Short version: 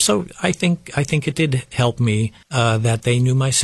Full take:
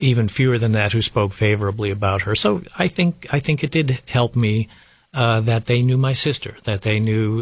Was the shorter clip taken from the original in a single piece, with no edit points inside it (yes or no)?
no